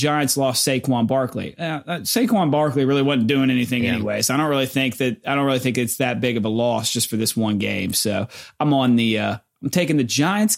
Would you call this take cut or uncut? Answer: uncut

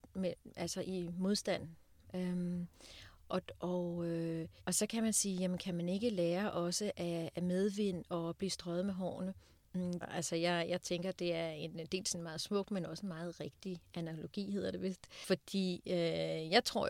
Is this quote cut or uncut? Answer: cut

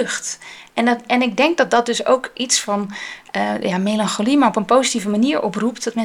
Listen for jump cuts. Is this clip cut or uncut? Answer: uncut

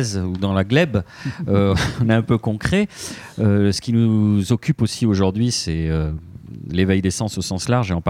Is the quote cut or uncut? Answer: uncut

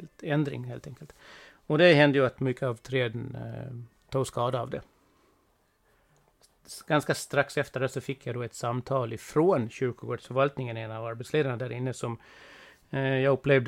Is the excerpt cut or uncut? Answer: uncut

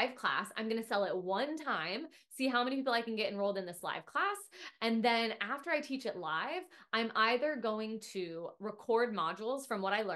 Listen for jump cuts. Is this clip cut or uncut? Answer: uncut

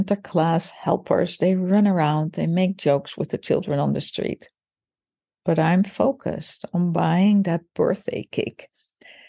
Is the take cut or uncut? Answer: uncut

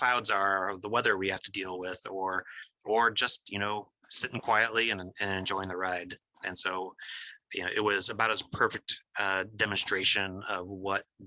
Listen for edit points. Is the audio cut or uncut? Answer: uncut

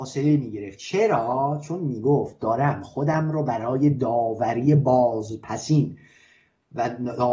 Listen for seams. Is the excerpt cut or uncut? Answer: uncut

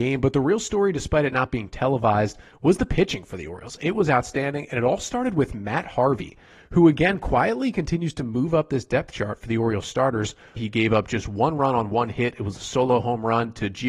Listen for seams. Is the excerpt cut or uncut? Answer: cut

